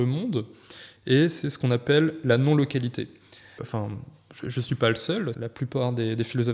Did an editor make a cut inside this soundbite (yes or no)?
yes